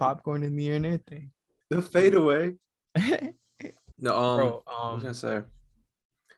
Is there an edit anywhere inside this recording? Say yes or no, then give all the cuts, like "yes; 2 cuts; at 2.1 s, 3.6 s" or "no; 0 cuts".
yes; 2 cuts; at 1.6 s, 3.9 s